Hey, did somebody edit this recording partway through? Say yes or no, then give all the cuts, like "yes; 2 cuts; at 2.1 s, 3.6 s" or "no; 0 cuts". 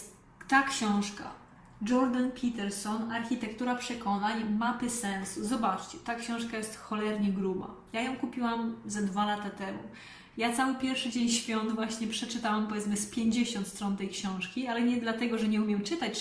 yes; 1 cut; at 10.3 s